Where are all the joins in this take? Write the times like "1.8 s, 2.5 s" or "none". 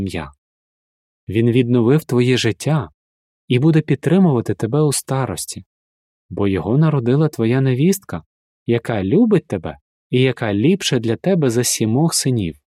none